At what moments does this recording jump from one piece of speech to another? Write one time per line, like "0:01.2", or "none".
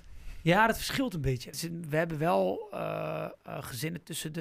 0:01.5